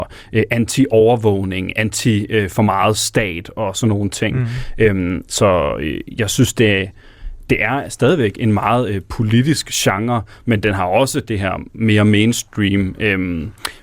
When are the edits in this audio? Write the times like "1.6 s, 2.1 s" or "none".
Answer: none